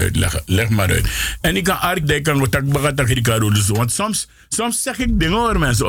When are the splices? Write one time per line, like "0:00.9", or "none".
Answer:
0:02.0

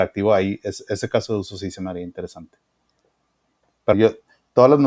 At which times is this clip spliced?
0:03.9

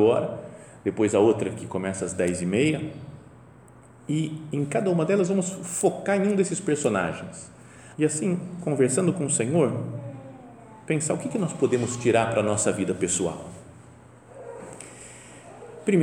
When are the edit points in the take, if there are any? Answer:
0:07.9

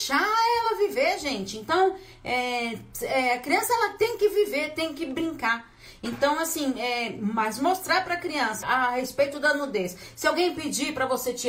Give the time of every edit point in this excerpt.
0:08.6

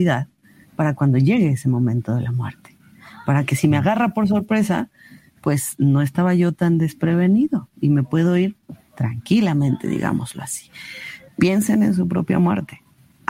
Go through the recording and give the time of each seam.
0:11.3

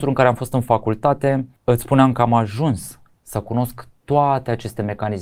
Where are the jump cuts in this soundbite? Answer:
0:01.6
0:03.1

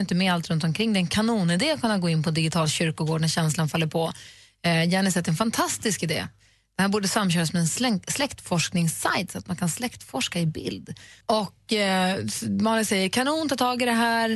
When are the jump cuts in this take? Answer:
0:11.2

